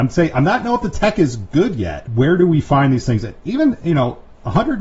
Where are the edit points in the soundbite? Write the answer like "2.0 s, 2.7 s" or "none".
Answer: 2.1 s